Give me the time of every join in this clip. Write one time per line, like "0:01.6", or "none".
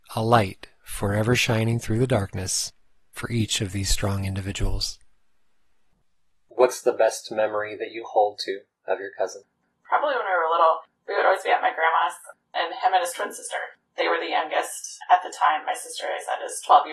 none